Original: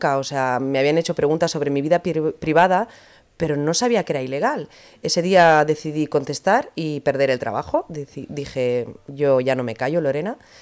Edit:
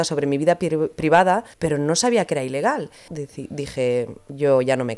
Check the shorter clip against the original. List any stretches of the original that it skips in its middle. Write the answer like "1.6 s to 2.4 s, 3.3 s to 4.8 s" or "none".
3.0 s to 3.3 s, 4.9 s to 7.9 s